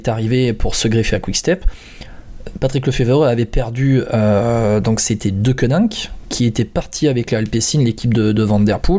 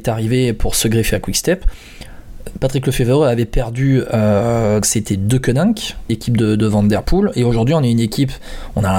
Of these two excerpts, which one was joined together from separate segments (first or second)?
second